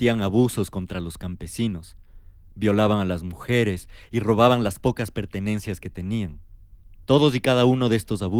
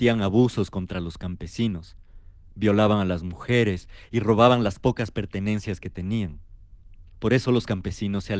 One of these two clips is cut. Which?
second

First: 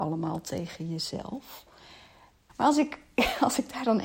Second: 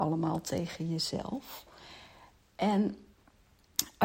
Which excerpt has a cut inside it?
first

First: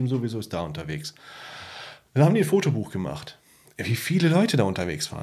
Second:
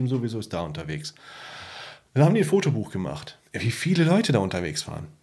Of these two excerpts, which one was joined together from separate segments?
second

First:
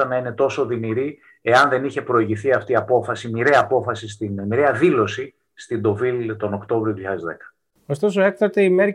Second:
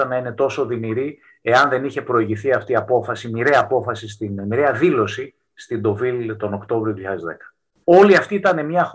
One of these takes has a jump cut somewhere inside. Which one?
second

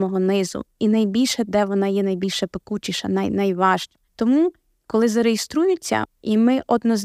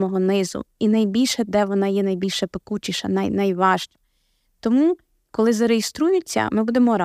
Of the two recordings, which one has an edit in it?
first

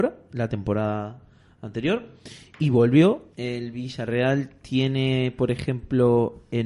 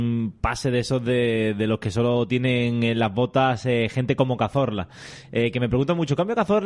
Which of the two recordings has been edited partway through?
first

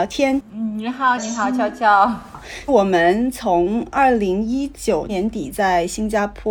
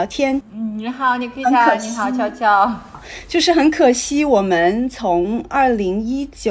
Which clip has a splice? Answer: first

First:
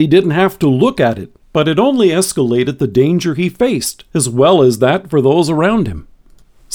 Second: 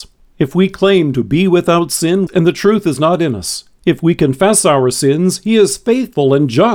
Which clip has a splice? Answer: second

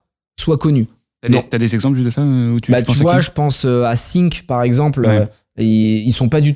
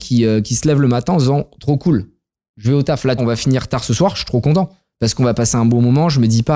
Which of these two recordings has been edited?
second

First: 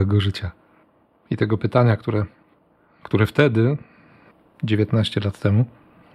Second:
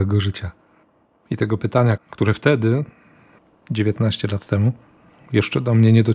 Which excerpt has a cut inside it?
second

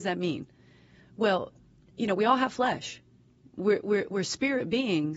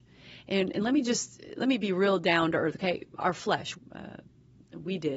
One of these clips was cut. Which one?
second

